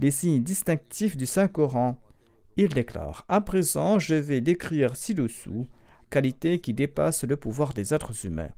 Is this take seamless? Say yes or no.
no